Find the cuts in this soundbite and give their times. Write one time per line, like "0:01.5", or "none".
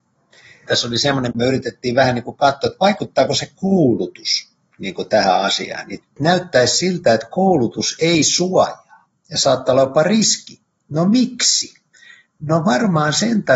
none

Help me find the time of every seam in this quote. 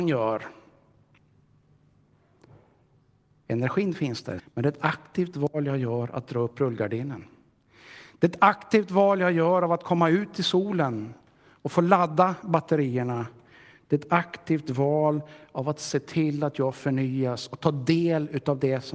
0:04.4

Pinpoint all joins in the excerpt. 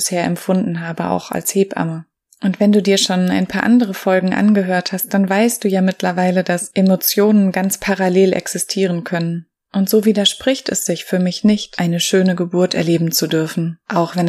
none

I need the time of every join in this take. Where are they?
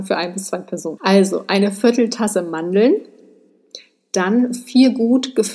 0:01.0

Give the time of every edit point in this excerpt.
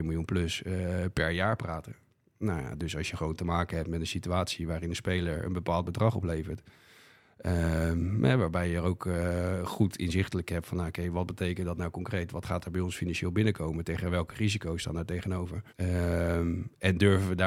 0:15.7

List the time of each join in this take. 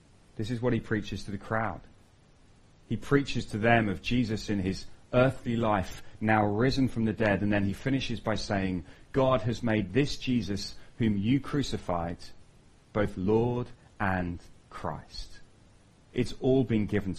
0:16.1

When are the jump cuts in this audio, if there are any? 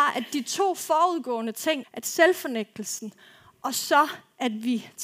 0:01.8

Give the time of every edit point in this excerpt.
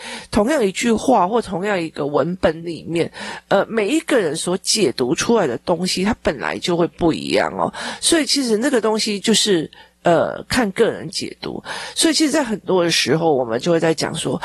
none

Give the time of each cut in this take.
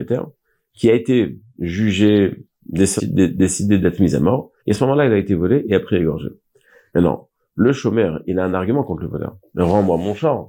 0:03.0
0:04.6

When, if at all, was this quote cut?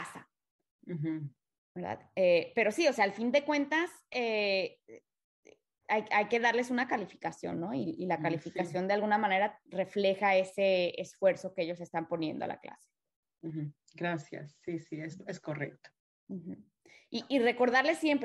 none

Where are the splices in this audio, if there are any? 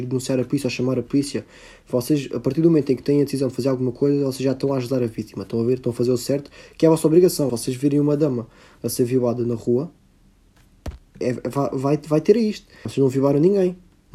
0:07.5
0:11.2
0:12.9

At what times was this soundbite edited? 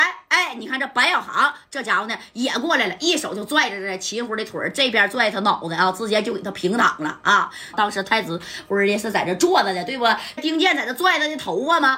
0:07.7
0:10.4

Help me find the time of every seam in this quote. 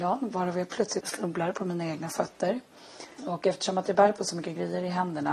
0:01.0
0:03.2

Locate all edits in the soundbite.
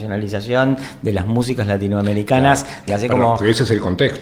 0:02.9

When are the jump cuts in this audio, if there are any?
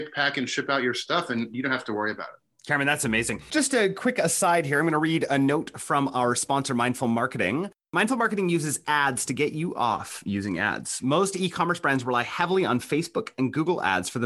none

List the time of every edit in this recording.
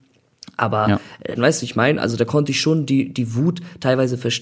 0:01.3

